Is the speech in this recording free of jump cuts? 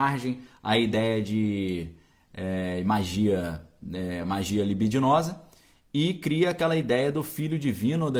yes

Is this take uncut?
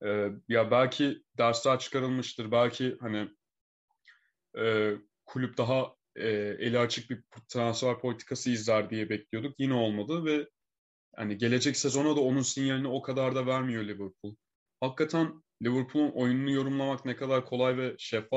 yes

